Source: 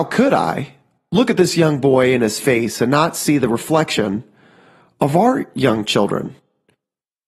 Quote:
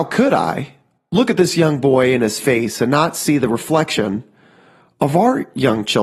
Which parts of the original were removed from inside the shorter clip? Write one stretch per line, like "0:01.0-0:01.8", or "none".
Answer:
none